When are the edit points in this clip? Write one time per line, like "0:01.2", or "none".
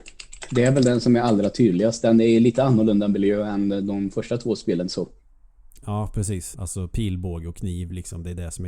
0:06.5